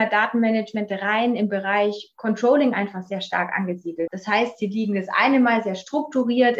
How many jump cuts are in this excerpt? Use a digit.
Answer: 1